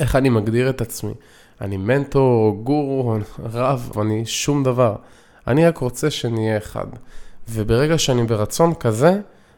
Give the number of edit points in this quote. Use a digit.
1